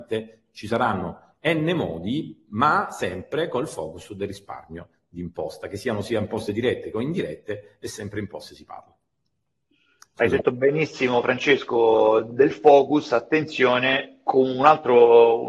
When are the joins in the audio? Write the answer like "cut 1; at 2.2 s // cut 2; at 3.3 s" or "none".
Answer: none